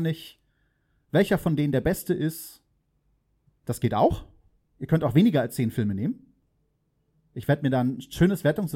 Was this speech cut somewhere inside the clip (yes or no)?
no